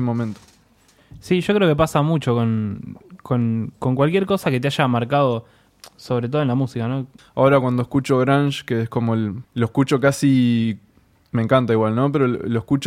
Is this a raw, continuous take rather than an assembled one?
no; 2 cuts; at 7.2 s, 9.4 s

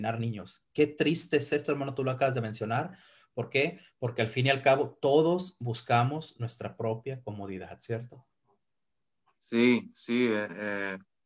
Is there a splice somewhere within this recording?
no; 0 cuts

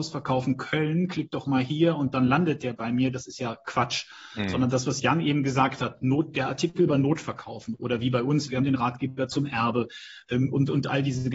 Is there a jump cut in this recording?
yes; 1 cut; at 8.5 s

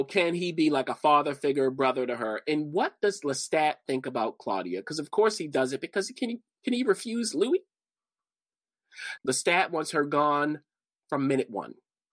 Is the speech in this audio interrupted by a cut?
yes; 1 cut; at 9.2 s

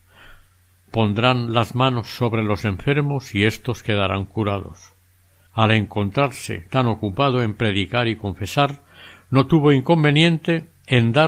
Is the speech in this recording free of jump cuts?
no; 1 cut; at 5.5 s

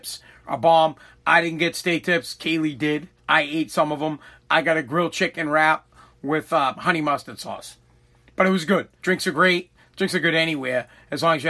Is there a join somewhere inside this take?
yes; 3 cuts; at 3.2 s, 6.7 s, 9.0 s

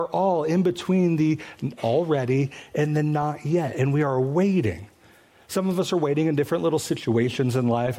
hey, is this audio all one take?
yes; 0 cuts

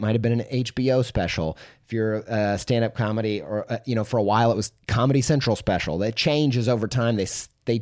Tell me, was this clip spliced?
no; 0 cuts

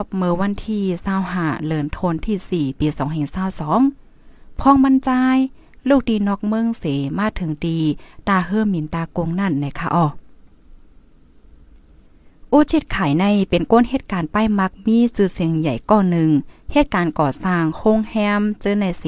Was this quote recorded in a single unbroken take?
yes; 0 cuts

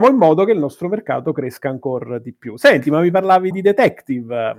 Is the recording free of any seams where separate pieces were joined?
no; 1 cut; at 3.5 s

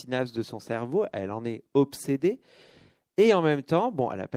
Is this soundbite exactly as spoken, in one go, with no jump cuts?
yes; 0 cuts

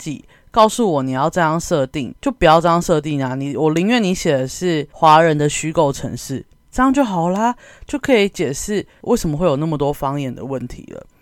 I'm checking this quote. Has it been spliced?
yes; 1 cut; at 2.1 s

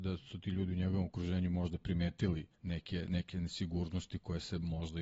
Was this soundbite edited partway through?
yes; 1 cut; at 2.5 s

